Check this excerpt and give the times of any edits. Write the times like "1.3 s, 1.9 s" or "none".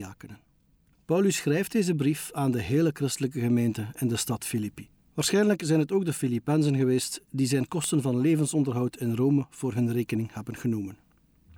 5.1 s